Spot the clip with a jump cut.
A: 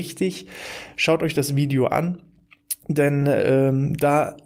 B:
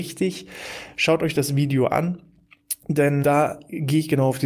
B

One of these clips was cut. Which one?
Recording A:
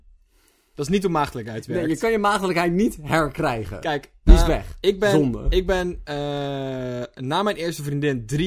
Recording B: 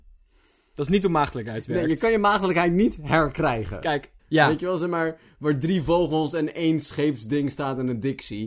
B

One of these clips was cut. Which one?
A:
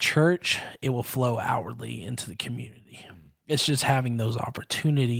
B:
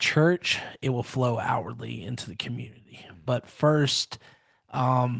B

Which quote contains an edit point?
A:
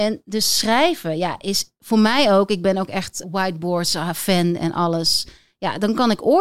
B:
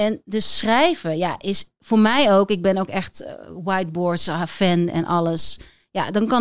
A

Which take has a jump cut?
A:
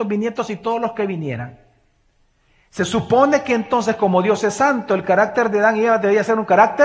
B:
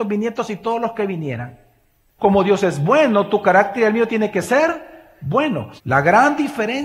B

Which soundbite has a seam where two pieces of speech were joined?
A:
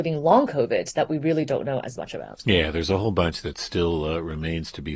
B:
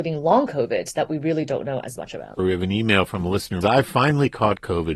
B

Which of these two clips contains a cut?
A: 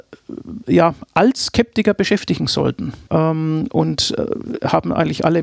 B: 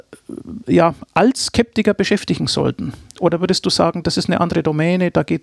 A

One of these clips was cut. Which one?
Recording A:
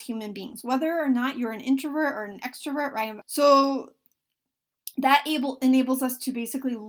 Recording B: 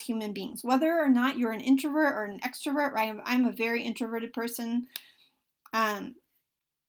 A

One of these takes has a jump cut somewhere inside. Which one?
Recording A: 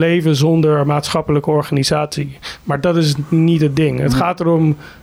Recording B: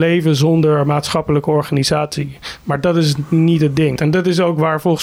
B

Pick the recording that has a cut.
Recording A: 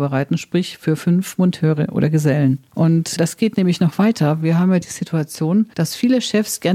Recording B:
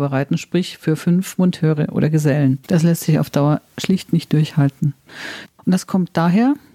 B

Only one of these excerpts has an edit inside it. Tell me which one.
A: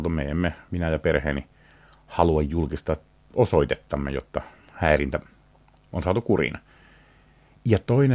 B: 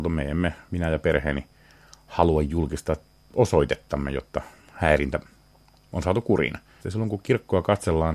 B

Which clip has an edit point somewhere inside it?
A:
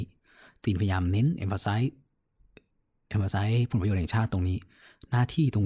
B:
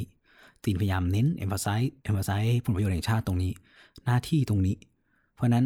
B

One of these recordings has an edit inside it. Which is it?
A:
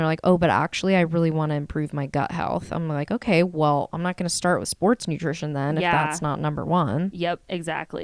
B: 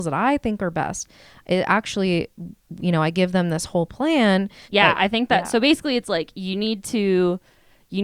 B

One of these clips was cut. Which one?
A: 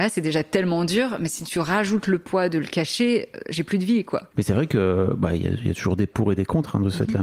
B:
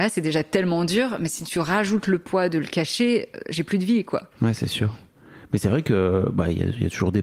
A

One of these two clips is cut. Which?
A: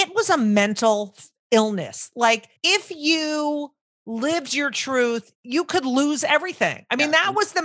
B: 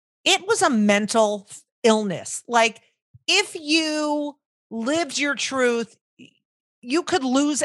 A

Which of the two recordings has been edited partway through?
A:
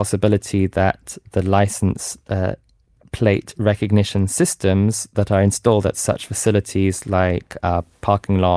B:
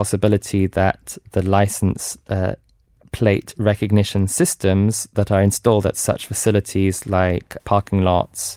B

